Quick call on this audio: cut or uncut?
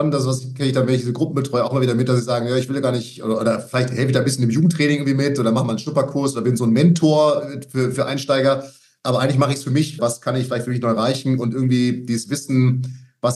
cut